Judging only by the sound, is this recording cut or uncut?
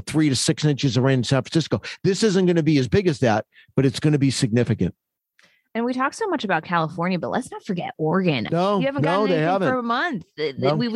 cut